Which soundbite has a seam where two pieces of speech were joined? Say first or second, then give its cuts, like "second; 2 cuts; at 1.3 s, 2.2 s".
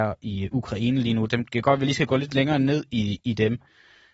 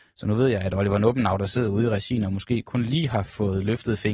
first; 1 cut; at 3.2 s